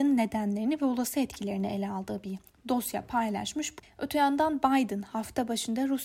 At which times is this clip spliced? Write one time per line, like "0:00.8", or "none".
0:03.8